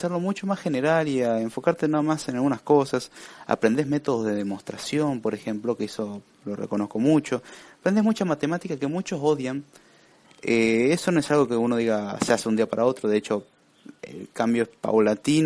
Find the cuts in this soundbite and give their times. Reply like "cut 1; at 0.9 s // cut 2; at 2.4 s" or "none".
cut 1; at 10.2 s